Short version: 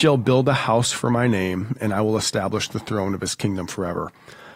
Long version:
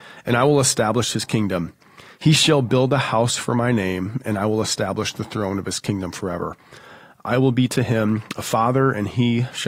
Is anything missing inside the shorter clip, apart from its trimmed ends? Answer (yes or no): no